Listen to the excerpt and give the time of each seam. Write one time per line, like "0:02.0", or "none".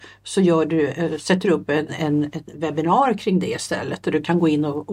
0:01.9